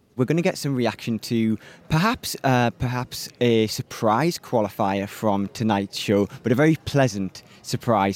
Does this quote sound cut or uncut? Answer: uncut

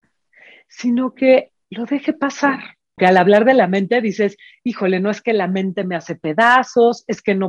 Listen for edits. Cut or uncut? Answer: cut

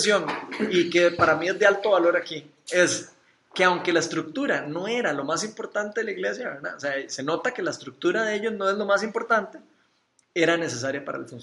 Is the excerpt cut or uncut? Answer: cut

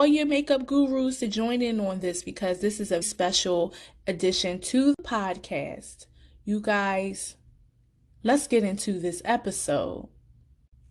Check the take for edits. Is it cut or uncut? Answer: cut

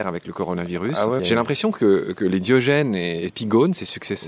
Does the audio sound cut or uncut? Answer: cut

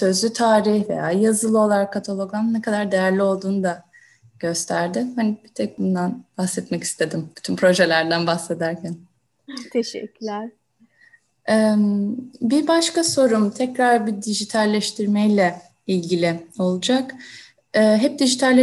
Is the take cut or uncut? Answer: uncut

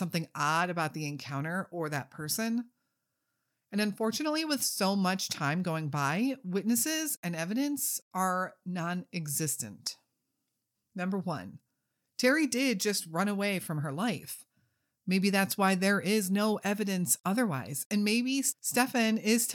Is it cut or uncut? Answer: cut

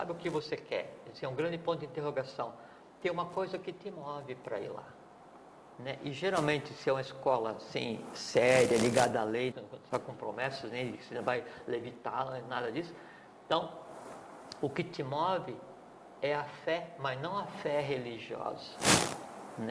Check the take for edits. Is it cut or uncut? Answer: cut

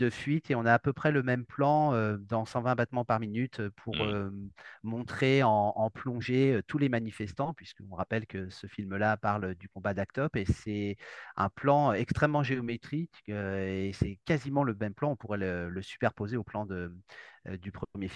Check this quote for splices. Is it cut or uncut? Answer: uncut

